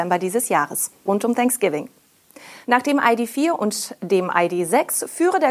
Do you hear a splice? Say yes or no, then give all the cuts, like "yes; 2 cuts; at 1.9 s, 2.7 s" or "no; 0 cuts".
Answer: yes; 2 cuts; at 1.1 s, 2.6 s